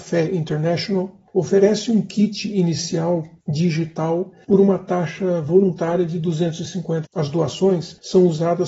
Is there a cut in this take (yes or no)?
yes